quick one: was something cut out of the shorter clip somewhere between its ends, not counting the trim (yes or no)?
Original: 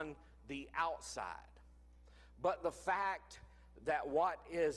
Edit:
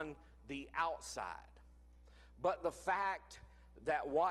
no